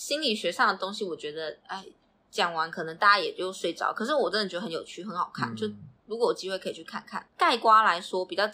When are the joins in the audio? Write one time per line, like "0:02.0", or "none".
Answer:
0:07.3